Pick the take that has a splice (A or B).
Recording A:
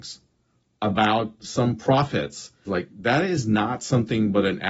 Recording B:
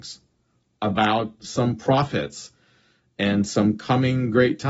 A